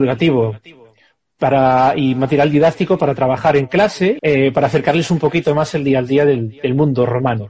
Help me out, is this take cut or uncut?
cut